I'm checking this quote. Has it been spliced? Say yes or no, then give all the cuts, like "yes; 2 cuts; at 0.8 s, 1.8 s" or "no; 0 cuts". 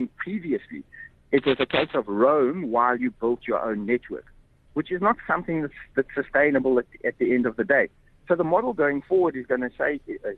no; 0 cuts